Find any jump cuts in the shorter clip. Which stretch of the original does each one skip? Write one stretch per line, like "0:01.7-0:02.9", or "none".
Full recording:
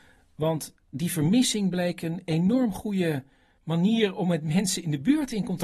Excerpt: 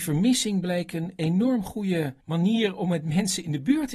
0:03.3-0:03.6